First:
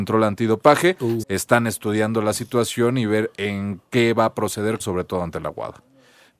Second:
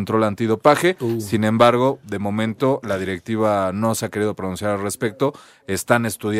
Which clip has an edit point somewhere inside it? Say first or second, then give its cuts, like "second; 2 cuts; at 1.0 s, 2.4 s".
first; 2 cuts; at 1.2 s, 4.8 s